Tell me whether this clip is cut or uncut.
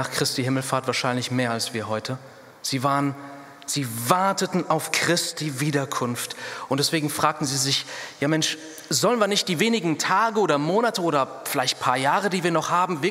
uncut